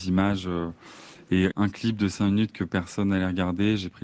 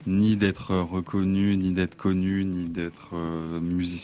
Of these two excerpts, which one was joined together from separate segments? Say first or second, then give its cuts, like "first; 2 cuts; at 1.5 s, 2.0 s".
first; 1 cut; at 1.5 s